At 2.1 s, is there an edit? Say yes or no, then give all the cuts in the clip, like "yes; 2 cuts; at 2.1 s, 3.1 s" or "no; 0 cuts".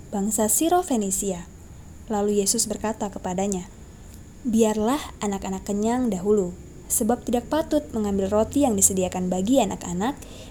yes; 1 cut; at 2.1 s